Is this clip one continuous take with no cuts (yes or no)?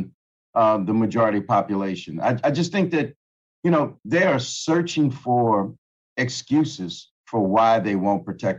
yes